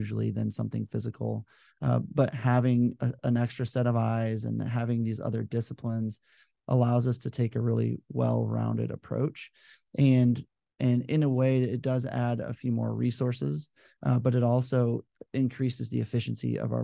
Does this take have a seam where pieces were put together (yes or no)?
yes